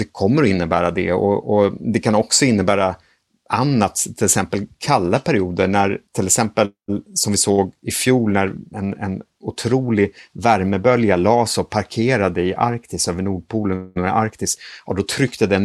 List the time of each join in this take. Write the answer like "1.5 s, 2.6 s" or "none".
6.1 s